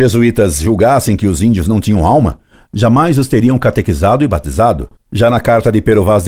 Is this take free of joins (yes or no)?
no